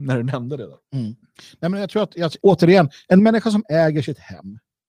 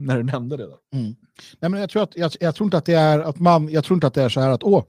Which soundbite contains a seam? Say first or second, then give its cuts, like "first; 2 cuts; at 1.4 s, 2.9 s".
first; 1 cut; at 2.4 s